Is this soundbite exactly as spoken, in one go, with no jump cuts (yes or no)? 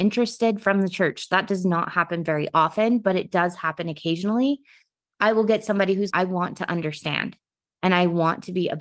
no